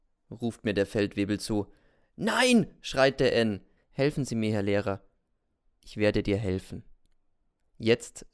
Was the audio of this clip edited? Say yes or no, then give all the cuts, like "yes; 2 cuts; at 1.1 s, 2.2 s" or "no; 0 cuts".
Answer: yes; 1 cut; at 3.8 s